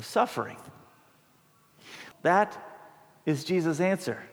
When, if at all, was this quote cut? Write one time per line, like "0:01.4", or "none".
0:02.1